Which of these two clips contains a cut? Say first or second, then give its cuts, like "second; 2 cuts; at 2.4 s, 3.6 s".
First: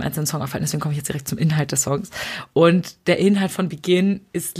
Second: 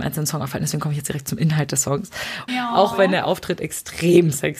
second; 1 cut; at 2.5 s